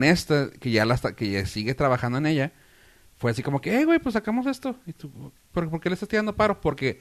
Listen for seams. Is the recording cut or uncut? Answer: uncut